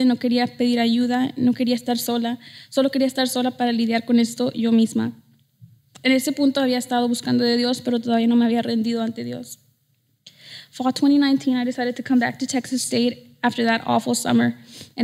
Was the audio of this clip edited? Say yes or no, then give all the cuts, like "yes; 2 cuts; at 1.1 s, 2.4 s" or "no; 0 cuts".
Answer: no; 0 cuts